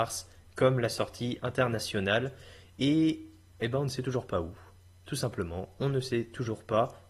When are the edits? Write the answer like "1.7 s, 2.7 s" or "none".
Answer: none